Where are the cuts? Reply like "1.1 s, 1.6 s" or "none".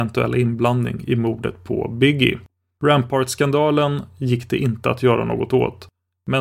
2.8 s